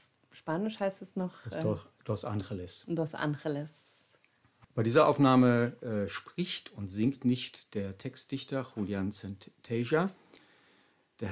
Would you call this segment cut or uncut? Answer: uncut